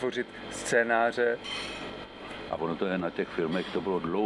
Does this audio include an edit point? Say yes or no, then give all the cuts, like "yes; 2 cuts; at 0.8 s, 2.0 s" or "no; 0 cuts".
yes; 1 cut; at 2.5 s